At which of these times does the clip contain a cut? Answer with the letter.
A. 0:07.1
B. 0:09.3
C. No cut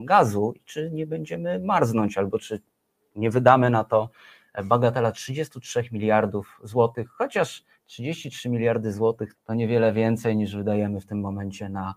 B